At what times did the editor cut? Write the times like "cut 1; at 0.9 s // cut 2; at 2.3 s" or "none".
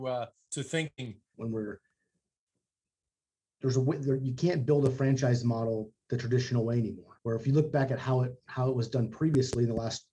cut 1; at 1.3 s // cut 2; at 7.2 s